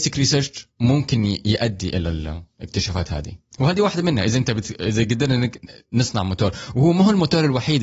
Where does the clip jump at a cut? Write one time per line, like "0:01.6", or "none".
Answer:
none